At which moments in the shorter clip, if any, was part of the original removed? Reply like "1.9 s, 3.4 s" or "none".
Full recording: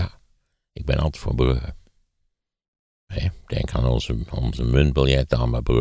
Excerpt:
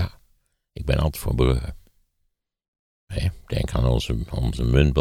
none